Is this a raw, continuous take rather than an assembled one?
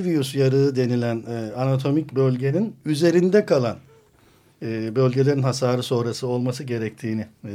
yes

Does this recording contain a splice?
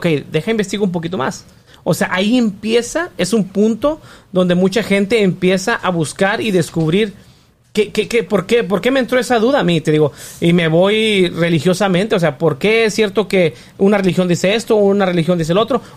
no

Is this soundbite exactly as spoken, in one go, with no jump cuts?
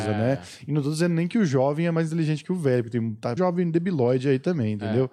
no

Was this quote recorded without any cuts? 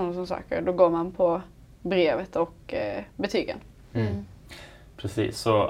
yes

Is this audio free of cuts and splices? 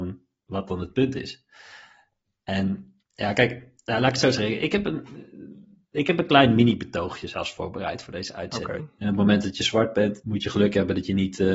no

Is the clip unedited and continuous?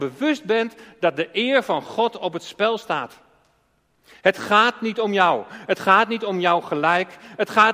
yes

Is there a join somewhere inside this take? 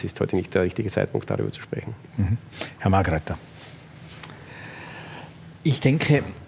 no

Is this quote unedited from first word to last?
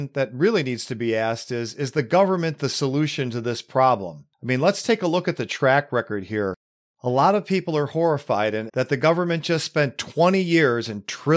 no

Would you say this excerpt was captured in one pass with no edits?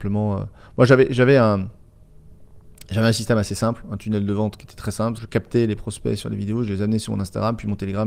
no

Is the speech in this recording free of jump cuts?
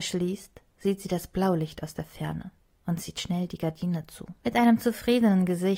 no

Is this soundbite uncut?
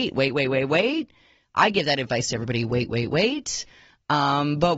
yes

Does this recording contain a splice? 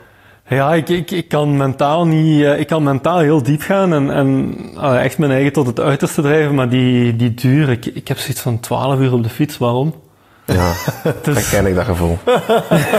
no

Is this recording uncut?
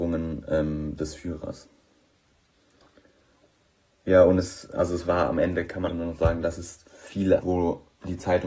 no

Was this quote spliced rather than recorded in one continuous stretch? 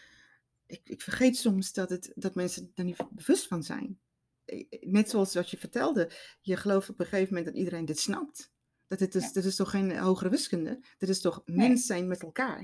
no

